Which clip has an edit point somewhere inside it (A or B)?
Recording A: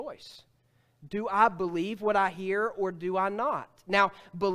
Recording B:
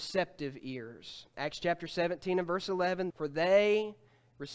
B